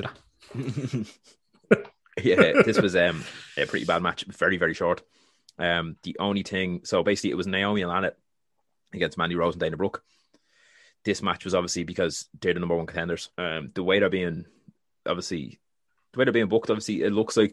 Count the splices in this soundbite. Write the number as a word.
one